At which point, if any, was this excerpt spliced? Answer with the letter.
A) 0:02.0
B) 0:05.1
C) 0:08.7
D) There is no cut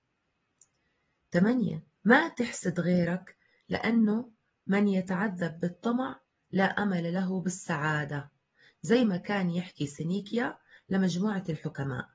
A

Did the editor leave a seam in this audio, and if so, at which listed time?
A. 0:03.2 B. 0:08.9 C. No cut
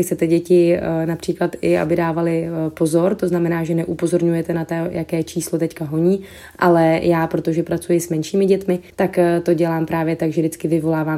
B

